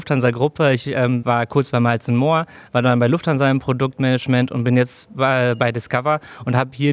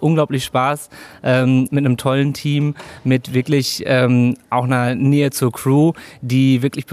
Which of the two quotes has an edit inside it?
first; 1 cut; at 1.2 s

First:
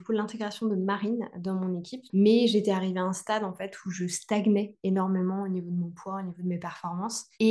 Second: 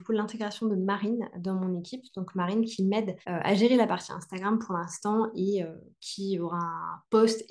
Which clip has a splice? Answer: first; 1 cut; at 2.1 s

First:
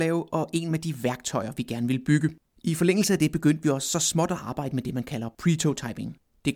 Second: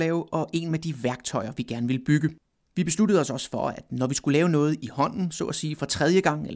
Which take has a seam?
first; 1 cut; at 2.5 s

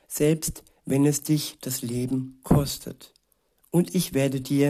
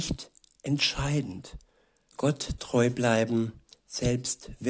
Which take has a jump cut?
second; 1 cut; at 2.1 s

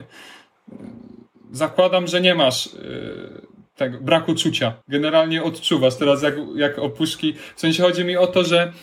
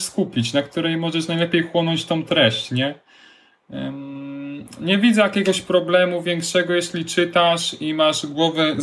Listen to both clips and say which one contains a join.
first; 1 cut; at 4.8 s

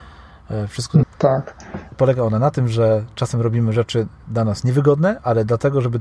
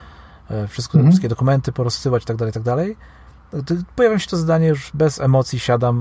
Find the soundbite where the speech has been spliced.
first; 1 cut; at 1.0 s

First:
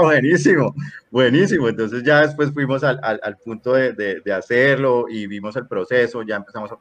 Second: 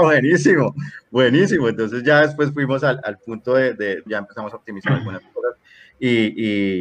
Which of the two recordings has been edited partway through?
second; 2 cuts; at 3.0 s, 4.1 s

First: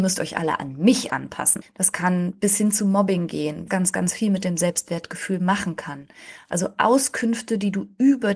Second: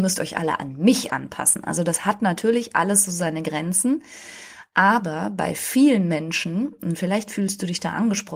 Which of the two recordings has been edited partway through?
first; 2 cuts; at 1.6 s, 3.7 s

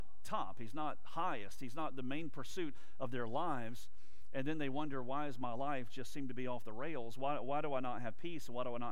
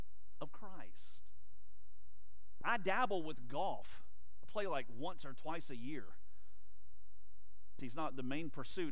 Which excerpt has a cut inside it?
second; 2 cuts; at 2.6 s, 7.8 s

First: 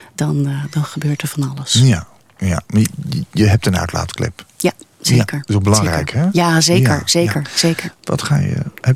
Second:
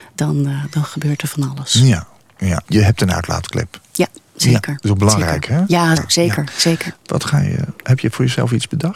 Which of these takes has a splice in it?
second; 2 cuts; at 2.6 s, 6.0 s

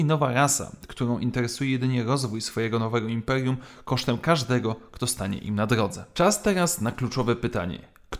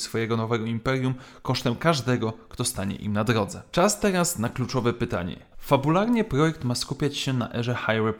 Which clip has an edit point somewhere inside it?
second; 1 cut; at 5.5 s

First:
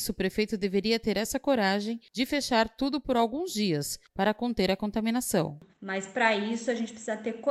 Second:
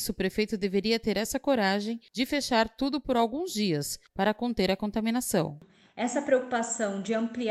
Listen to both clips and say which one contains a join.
first; 1 cut; at 5.7 s

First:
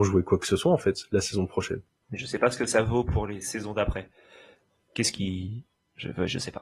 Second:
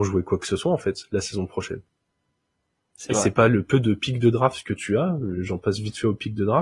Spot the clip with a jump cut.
first; 1 cut; at 2.0 s

